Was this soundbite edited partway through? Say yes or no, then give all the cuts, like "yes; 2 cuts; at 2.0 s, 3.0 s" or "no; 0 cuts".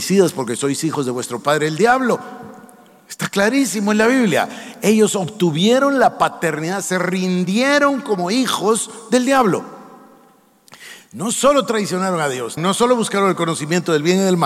yes; 1 cut; at 12.6 s